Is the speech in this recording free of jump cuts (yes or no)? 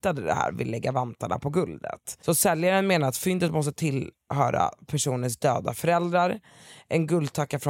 yes